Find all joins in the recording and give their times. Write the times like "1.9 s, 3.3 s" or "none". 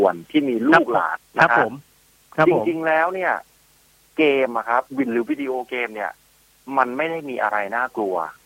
1.2 s, 4.9 s